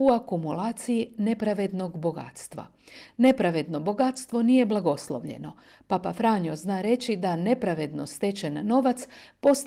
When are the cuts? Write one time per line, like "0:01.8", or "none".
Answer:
none